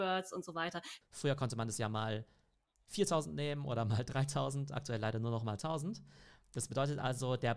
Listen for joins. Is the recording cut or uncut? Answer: cut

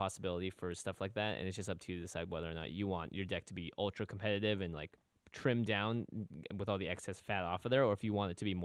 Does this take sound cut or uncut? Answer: uncut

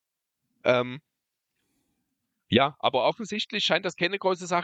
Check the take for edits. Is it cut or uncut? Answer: uncut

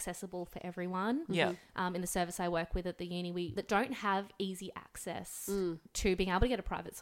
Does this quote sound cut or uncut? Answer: cut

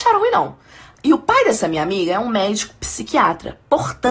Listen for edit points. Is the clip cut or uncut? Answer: cut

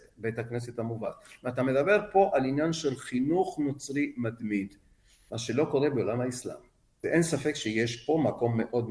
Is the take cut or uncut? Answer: cut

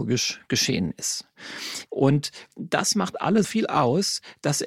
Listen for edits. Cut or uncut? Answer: cut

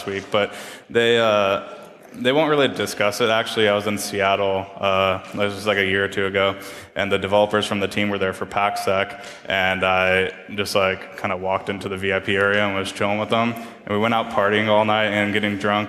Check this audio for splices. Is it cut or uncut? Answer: uncut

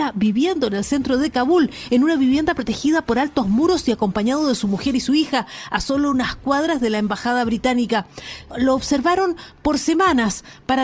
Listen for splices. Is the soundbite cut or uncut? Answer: uncut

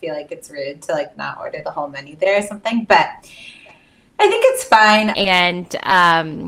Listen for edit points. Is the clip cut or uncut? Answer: cut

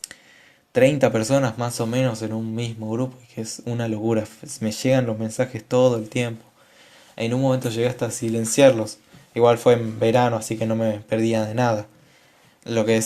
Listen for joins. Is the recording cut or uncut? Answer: uncut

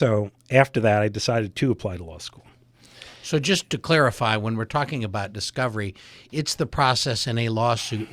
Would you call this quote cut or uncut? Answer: uncut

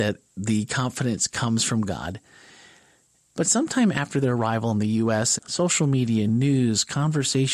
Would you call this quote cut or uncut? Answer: cut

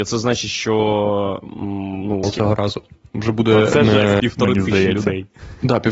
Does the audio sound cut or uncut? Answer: cut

